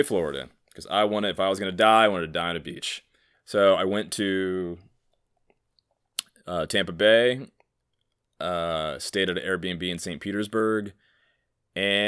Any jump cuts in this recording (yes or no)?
yes